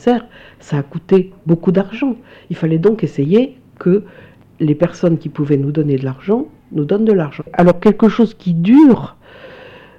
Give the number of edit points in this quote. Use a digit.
1